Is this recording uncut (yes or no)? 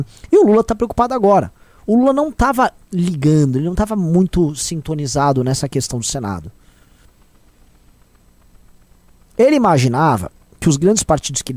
yes